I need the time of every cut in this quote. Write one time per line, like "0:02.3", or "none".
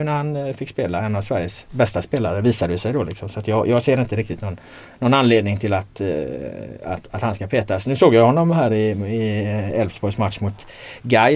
none